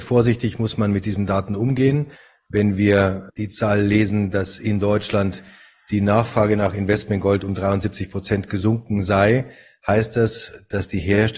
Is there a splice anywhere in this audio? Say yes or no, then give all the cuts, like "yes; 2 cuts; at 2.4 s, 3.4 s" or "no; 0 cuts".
yes; 1 cut; at 3.3 s